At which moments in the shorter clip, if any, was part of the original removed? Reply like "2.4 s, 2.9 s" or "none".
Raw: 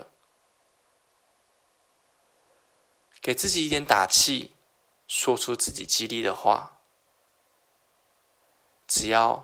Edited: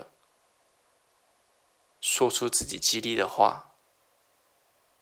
1.9 s